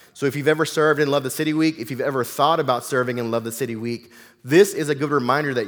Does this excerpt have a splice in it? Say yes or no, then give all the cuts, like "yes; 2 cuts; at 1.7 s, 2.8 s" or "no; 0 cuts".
no; 0 cuts